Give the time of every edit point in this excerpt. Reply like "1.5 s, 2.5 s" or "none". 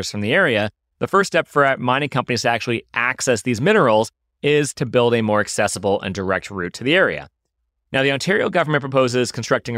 none